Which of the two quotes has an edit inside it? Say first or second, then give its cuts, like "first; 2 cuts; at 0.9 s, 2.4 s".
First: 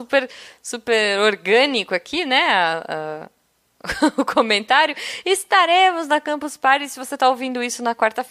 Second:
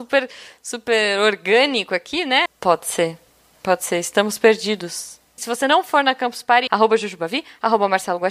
second; 3 cuts; at 2.5 s, 5.4 s, 6.7 s